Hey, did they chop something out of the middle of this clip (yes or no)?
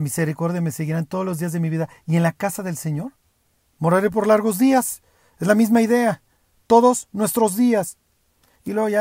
no